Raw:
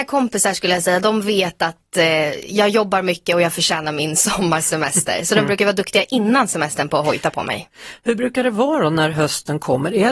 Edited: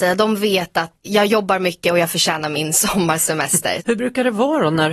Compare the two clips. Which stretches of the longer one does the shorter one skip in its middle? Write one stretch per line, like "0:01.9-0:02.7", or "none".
0:01.9-0:02.5
0:05.2-0:08.0